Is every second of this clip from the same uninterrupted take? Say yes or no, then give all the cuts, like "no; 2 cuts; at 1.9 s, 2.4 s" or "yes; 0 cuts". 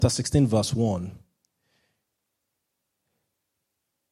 yes; 0 cuts